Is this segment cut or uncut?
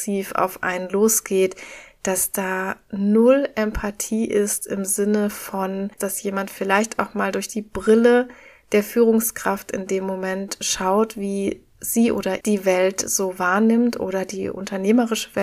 cut